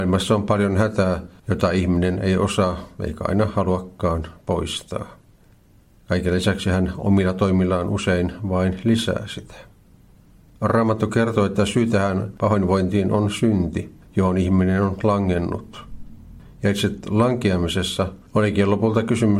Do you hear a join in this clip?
no; 0 cuts

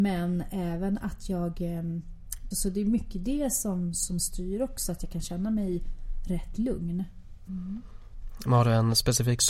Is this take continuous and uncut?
no; 2 cuts; at 2.5 s, 7.5 s

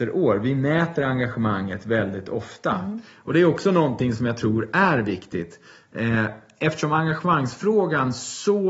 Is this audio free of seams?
yes; 0 cuts

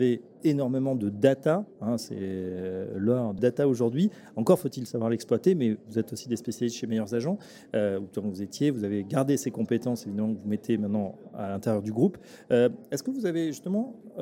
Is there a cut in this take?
yes; 1 cut; at 3.4 s

